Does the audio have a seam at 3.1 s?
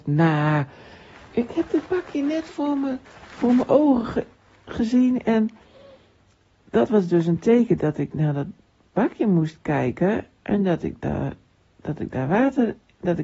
no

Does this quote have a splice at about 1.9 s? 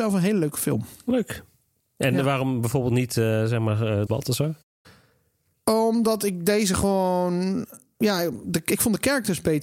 no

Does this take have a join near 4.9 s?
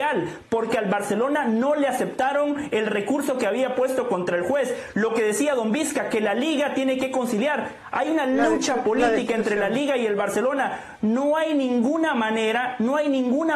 no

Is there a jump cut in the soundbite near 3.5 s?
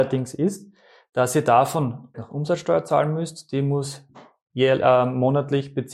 no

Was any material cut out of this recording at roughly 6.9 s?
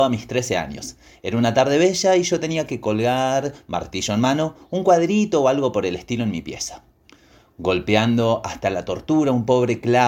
no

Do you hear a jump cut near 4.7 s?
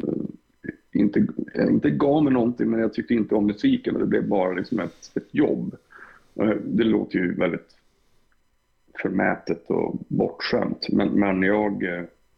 no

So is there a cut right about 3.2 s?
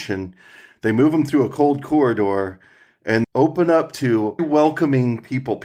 yes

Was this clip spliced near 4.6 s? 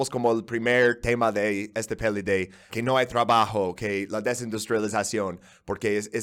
no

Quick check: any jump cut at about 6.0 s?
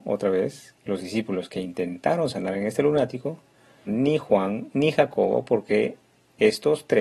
no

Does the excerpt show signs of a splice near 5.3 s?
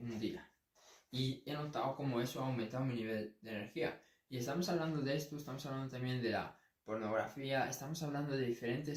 no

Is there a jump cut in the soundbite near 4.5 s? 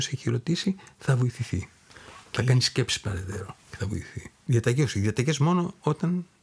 yes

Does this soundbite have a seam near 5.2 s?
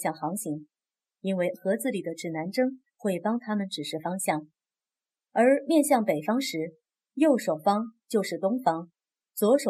yes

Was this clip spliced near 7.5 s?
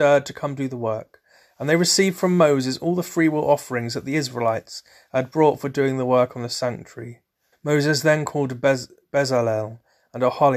yes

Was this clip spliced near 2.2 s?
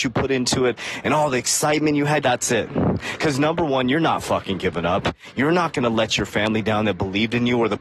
yes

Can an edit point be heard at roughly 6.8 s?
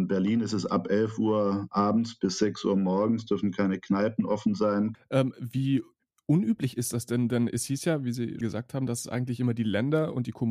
no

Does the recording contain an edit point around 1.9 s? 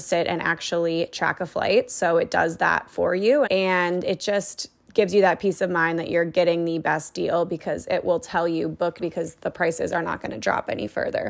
no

